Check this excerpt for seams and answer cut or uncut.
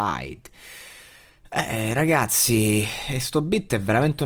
uncut